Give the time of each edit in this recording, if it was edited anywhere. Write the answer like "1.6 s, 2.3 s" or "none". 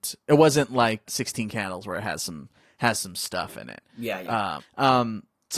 1.0 s, 4.6 s